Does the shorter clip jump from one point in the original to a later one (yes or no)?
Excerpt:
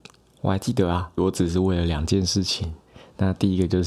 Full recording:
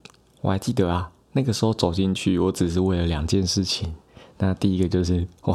yes